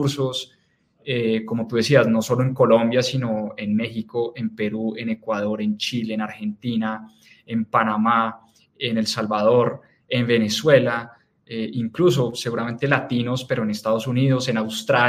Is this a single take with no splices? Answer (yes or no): yes